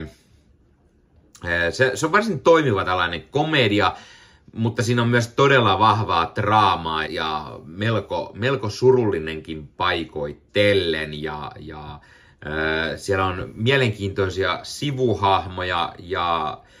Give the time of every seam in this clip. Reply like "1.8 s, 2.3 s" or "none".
7.1 s